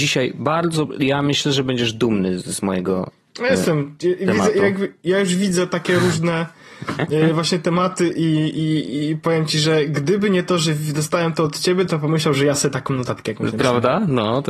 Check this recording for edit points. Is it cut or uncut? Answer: uncut